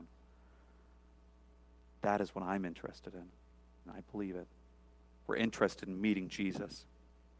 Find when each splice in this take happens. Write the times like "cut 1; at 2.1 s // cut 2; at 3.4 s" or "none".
cut 1; at 3.8 s